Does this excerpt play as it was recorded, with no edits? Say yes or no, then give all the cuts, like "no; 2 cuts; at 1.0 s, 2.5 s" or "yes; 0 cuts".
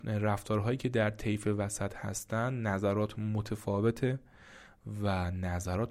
yes; 0 cuts